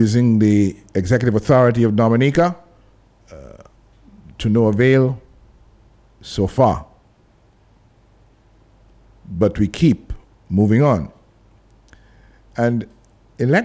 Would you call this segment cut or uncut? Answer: uncut